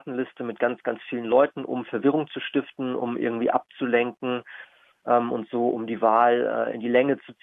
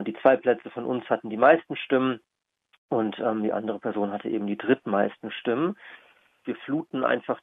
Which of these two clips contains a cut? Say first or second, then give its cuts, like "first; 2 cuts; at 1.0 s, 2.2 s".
second; 1 cut; at 6.4 s